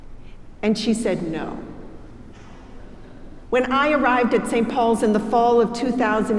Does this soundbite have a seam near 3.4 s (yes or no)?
yes